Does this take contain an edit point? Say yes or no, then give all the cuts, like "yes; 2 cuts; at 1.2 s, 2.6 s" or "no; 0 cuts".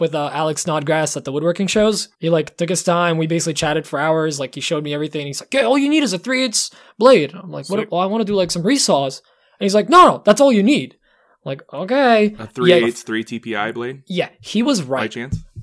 yes; 1 cut; at 2.1 s